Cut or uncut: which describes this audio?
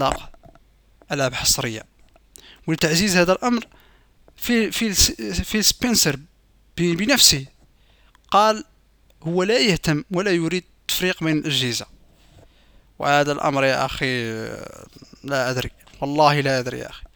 uncut